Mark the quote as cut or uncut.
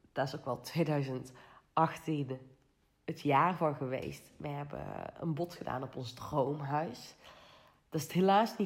uncut